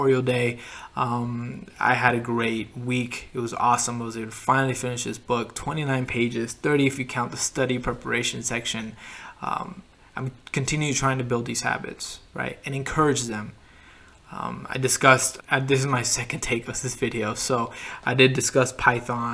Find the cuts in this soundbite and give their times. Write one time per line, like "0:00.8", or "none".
0:15.4